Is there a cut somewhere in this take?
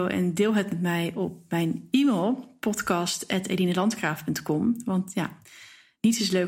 no; 0 cuts

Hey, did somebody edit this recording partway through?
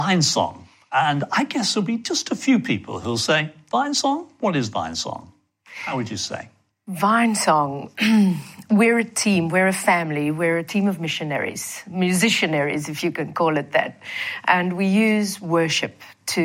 no; 0 cuts

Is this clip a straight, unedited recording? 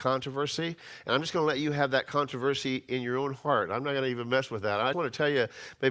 no; 1 cut; at 4.9 s

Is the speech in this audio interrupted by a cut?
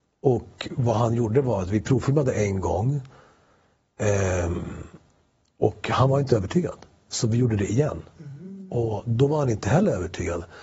no; 0 cuts

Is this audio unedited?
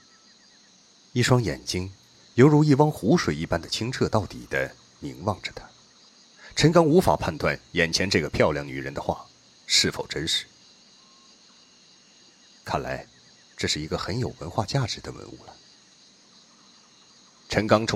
yes; 0 cuts

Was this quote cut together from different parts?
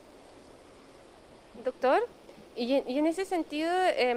no; 0 cuts

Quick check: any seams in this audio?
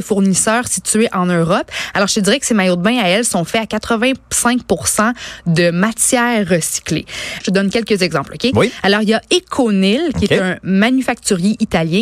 yes; 1 cut; at 7.4 s

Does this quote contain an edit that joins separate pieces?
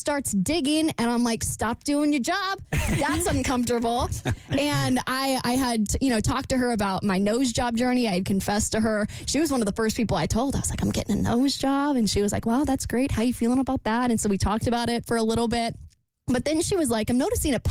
no; 0 cuts

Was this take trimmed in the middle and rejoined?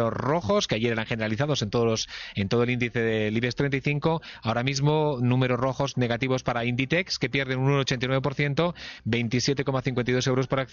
no; 0 cuts

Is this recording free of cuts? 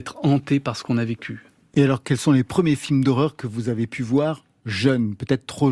yes; 0 cuts

